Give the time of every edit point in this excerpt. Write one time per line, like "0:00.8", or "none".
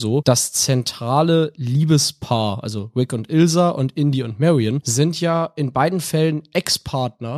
none